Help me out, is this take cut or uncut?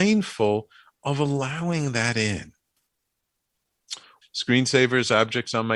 cut